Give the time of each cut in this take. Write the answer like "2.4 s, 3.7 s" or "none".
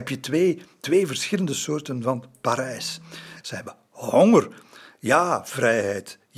3.4 s